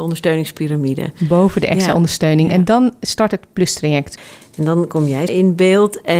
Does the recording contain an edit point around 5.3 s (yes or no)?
yes